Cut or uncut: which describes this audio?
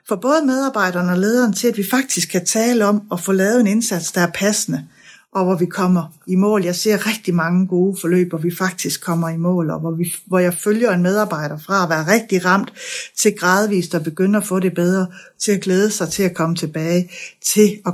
uncut